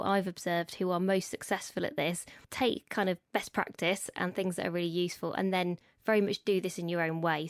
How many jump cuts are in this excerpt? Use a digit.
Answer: 1